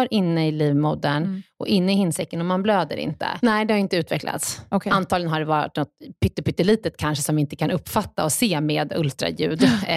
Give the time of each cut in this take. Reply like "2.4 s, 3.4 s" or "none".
3.4 s